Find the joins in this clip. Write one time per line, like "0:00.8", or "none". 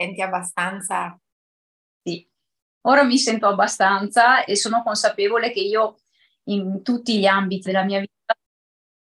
0:04.5
0:07.7